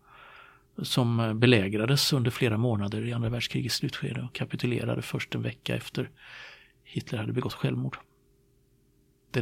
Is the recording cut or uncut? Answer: uncut